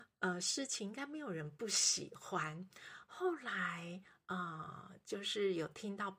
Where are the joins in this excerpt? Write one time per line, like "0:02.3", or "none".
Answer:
none